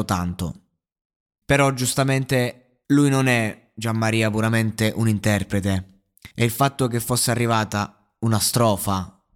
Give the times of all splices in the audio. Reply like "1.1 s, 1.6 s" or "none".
1.4 s, 2.8 s, 6.3 s